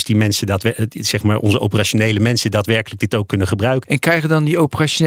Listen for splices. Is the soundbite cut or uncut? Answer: cut